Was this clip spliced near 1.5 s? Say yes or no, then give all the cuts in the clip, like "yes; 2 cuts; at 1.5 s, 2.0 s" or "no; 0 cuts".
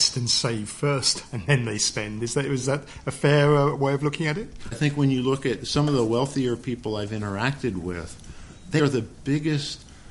no; 2 cuts; at 4.7 s, 8.8 s